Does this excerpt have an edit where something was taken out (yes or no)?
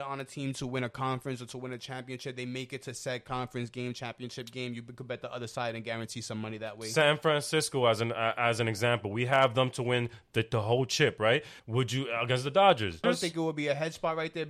yes